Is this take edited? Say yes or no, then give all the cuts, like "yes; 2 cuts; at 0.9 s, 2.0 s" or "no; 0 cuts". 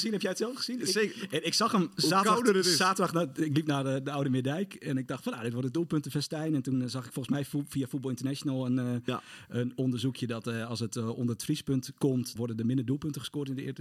yes; 1 cut; at 12.4 s